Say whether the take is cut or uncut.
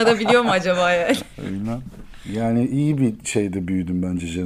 uncut